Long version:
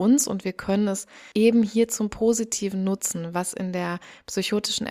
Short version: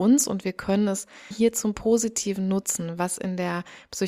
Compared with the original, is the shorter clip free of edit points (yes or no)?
no